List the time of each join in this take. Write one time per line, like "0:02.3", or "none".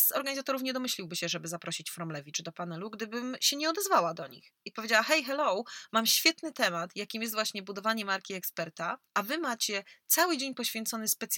0:09.1